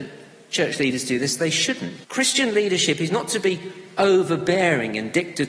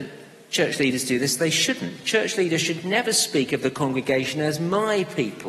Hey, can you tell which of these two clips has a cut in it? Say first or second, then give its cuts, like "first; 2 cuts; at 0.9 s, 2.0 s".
first; 1 cut; at 2.0 s